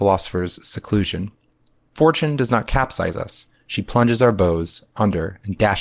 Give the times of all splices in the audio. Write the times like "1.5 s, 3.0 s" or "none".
none